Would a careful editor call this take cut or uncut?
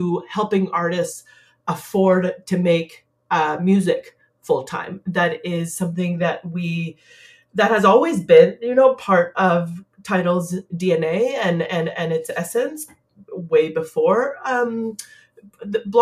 uncut